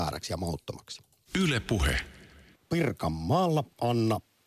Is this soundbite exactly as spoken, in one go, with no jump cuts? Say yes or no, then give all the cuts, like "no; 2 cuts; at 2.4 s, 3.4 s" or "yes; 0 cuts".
yes; 0 cuts